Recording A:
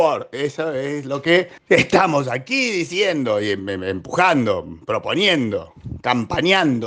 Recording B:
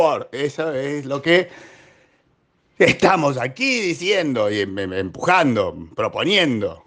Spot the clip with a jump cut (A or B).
A